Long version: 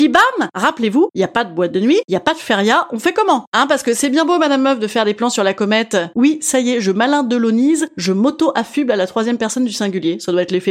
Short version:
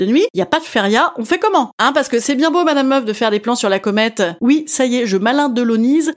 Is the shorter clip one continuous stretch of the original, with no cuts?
yes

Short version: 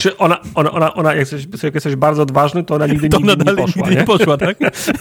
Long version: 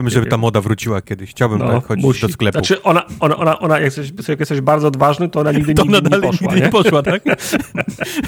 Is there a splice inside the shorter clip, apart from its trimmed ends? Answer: no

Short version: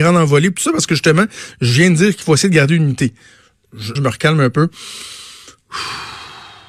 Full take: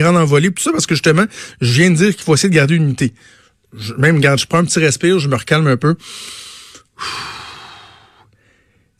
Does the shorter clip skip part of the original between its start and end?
yes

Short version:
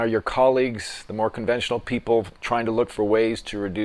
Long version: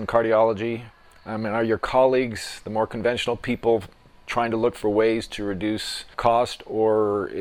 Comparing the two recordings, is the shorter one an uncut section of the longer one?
no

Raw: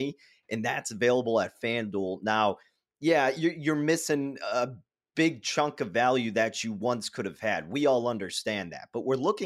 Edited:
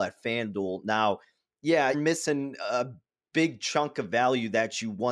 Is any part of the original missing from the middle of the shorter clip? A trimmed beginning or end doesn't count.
yes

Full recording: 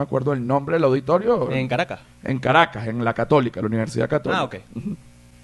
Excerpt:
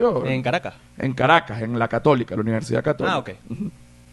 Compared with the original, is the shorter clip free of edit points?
yes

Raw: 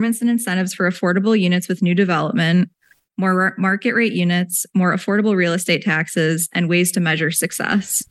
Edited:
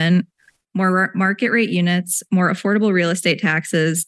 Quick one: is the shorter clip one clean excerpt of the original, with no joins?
yes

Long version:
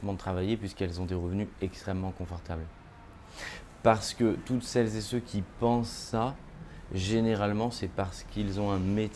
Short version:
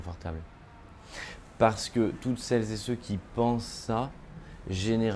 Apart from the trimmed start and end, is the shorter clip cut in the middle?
no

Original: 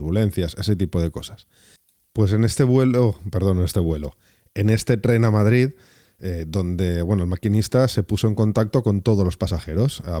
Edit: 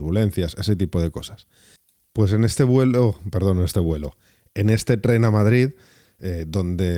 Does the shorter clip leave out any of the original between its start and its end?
no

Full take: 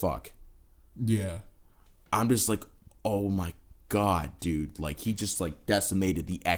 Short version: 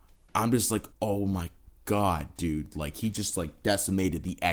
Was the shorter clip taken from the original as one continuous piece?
no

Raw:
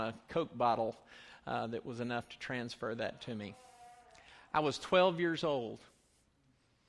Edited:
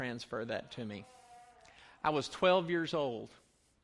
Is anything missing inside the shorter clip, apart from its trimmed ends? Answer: no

